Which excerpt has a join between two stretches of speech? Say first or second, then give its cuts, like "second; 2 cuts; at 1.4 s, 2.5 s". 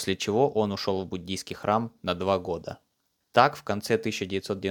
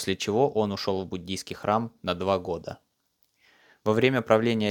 first; 1 cut; at 3.2 s